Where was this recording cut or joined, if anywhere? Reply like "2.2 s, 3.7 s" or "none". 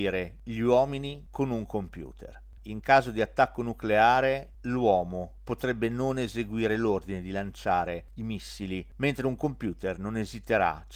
2.6 s